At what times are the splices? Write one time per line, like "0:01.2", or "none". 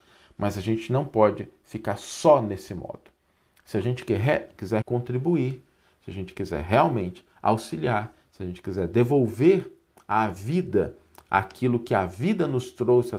0:04.8